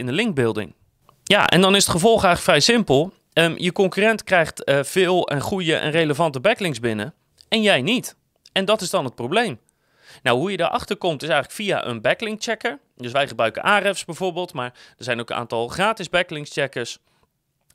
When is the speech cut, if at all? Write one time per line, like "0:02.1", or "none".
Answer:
none